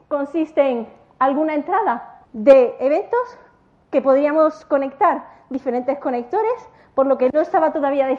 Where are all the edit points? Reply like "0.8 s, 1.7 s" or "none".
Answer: 2.2 s